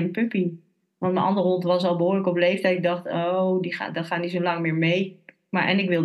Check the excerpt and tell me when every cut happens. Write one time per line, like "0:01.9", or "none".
none